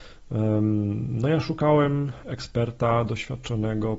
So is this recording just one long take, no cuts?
yes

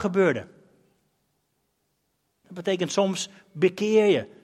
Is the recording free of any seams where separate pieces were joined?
no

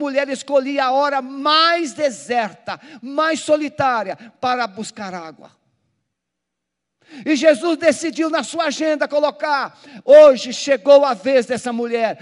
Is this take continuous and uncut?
yes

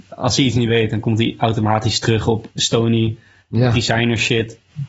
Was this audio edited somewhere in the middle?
no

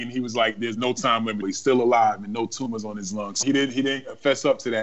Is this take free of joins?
no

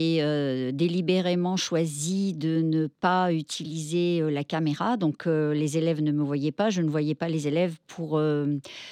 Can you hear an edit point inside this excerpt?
no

